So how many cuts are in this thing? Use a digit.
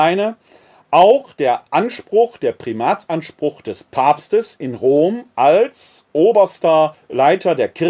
1